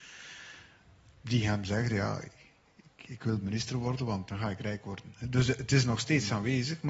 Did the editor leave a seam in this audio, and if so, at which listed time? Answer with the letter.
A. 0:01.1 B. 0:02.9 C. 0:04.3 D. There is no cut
C